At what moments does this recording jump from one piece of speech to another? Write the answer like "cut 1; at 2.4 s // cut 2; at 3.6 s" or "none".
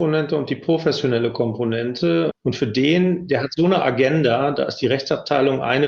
cut 1; at 2.3 s